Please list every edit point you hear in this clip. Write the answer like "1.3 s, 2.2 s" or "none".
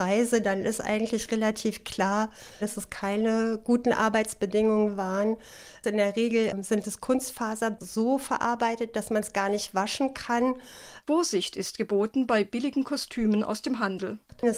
2.6 s, 11.0 s